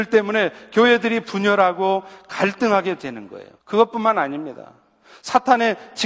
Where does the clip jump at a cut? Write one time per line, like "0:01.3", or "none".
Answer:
0:03.6